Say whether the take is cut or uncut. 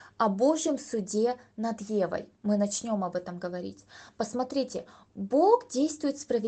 uncut